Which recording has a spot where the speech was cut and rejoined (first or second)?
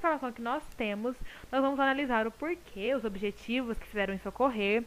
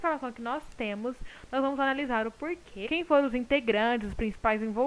second